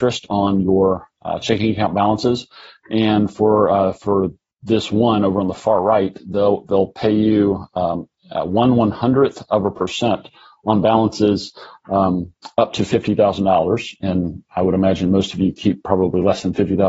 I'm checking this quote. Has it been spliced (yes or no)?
no